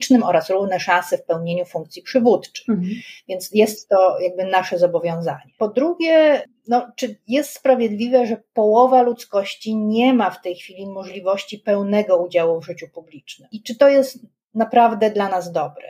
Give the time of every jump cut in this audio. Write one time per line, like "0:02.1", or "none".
none